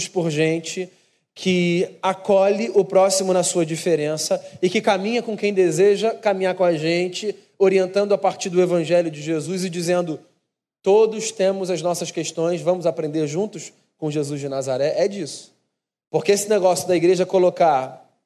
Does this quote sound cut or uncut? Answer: uncut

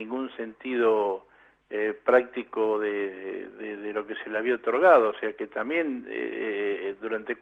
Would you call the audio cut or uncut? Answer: uncut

